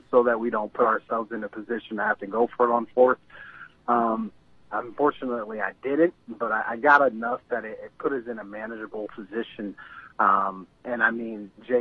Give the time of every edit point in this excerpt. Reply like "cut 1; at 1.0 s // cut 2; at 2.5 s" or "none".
cut 1; at 4.7 s